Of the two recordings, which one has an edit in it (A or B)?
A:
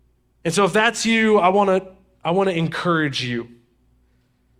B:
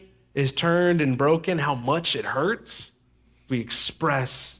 B